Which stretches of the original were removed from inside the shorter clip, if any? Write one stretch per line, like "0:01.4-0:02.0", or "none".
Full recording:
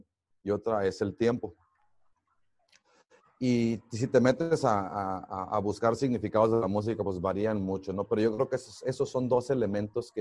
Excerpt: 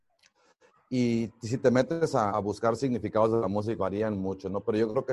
0:04.8-0:05.5
0:07.0-0:07.2